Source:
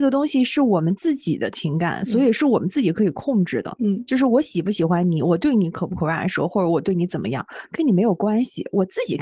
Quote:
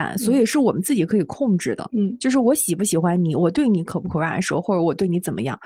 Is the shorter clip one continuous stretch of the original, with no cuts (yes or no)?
yes